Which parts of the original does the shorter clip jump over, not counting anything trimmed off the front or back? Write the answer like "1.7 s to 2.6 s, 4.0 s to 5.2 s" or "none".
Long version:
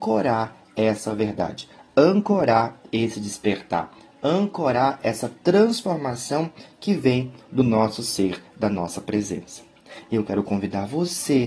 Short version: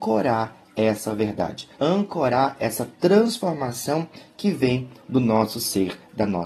1.8 s to 4.2 s